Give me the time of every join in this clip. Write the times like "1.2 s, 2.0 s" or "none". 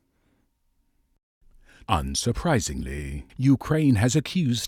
1.8 s, 3.3 s

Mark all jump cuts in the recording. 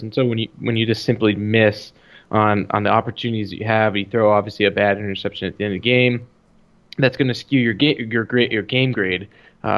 none

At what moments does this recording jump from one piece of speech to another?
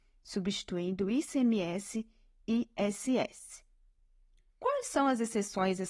4.5 s

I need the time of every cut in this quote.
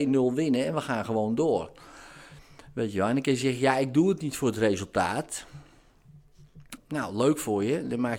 6.8 s

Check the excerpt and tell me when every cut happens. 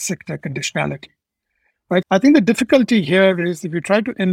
2.0 s

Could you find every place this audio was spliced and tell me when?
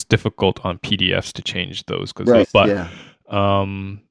2.4 s

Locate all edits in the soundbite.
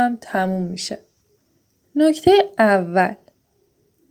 none

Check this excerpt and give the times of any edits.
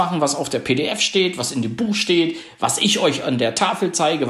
none

